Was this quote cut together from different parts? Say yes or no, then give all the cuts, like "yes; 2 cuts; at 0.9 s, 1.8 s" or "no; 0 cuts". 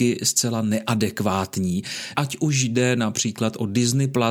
yes; 1 cut; at 2.1 s